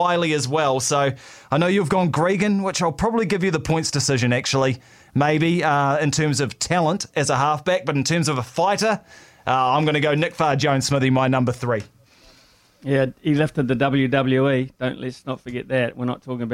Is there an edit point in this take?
no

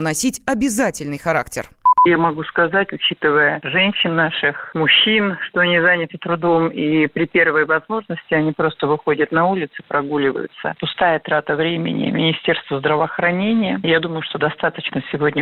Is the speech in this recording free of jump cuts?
yes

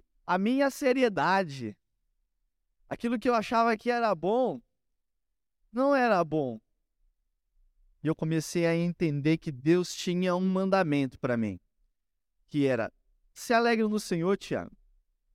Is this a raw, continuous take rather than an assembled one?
yes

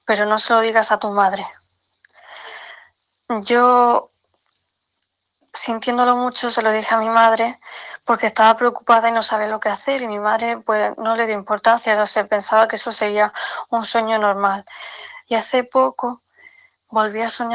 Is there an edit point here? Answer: yes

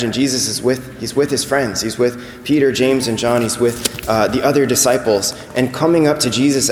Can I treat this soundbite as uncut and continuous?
yes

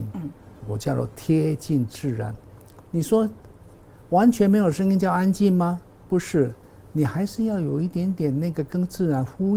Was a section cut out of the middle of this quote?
no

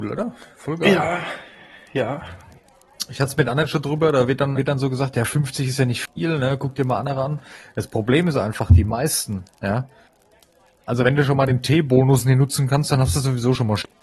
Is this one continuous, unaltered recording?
no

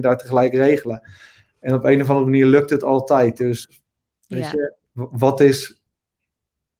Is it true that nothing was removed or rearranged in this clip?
no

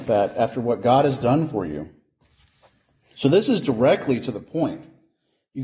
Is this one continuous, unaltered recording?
yes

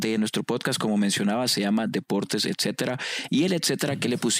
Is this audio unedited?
no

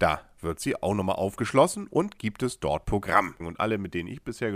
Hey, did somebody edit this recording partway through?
yes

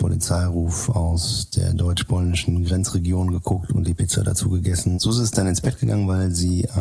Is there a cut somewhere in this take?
yes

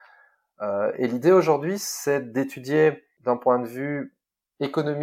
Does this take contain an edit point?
no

